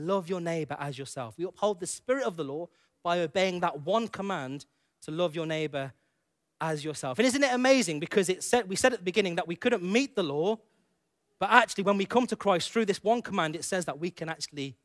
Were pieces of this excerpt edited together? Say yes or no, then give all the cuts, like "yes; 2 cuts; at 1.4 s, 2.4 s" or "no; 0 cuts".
no; 0 cuts